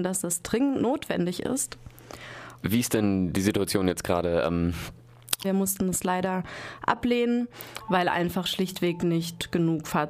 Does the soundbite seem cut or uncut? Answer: cut